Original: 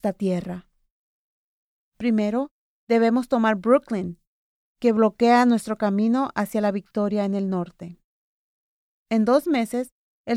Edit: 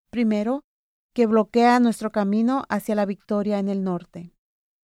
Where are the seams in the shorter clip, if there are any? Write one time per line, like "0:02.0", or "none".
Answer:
0:00.9